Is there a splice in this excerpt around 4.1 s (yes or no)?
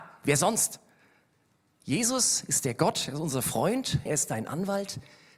yes